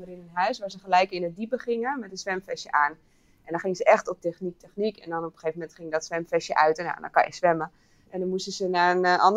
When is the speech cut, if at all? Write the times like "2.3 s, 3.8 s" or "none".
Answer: 4.2 s, 8.1 s